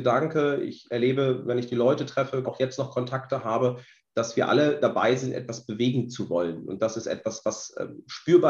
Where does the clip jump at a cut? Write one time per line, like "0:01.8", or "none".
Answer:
0:02.4